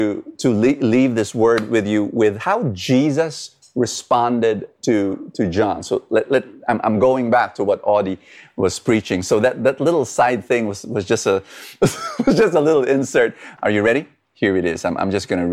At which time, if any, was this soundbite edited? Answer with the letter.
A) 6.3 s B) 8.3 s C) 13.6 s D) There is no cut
C